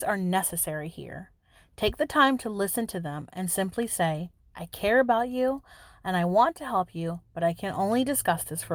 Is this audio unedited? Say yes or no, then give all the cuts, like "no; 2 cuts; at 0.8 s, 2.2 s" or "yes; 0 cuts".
yes; 0 cuts